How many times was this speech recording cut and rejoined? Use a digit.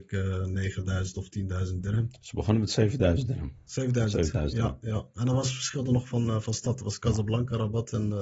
0